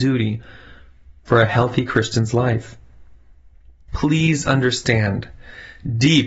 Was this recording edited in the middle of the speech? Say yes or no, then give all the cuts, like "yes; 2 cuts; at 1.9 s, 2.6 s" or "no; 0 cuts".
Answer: yes; 1 cut; at 3.9 s